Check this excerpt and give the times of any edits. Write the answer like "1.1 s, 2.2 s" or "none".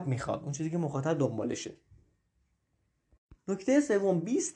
none